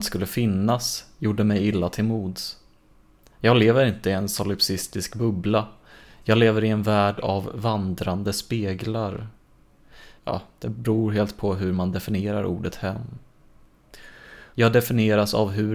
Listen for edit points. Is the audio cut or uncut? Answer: cut